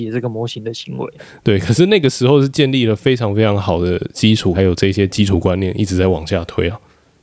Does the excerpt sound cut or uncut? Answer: cut